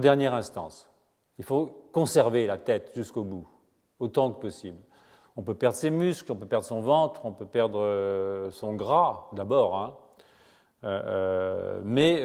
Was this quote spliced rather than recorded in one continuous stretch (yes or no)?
no